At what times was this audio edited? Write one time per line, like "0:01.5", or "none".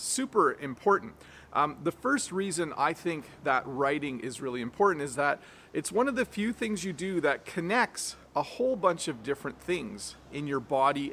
none